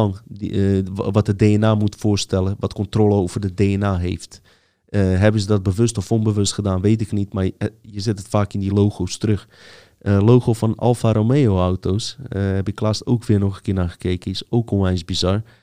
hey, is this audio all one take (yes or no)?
yes